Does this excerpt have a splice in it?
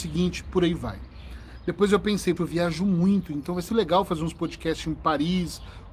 yes; 2 cuts; at 2.4 s, 3.7 s

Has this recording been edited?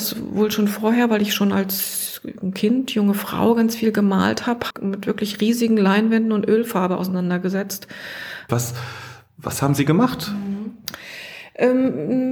yes; 2 cuts; at 4.7 s, 8.5 s

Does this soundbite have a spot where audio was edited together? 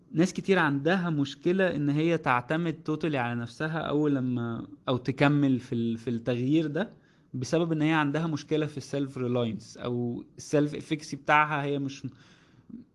no; 0 cuts

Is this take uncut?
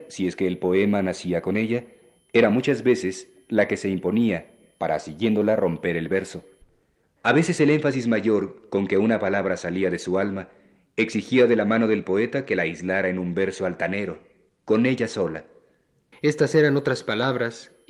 no; 2 cuts; at 7.0 s, 16.1 s

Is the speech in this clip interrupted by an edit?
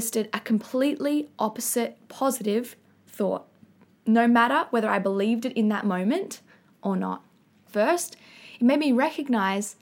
yes; 1 cut; at 7.7 s

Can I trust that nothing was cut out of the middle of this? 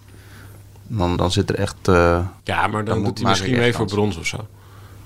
no; 2 cuts; at 1.2 s, 2.4 s

